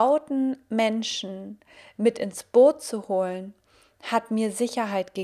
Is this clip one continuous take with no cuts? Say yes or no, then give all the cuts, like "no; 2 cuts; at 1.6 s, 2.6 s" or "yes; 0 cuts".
yes; 0 cuts